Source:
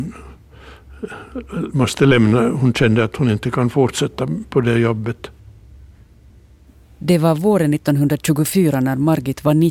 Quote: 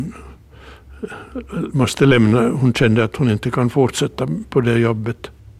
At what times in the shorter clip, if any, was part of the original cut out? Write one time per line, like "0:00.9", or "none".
none